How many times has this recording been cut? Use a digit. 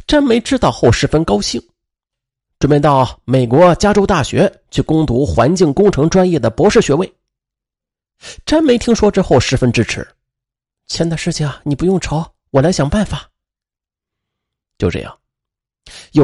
1